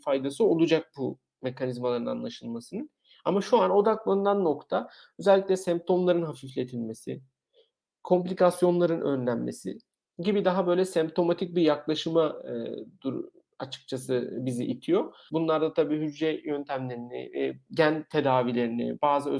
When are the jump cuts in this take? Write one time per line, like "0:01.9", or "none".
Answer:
0:15.3
0:17.7